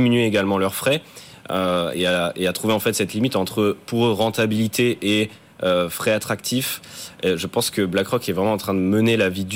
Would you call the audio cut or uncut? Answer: uncut